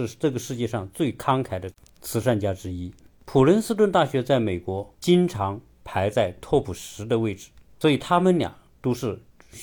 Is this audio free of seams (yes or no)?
no